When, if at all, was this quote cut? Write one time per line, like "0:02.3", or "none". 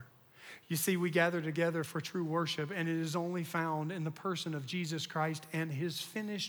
none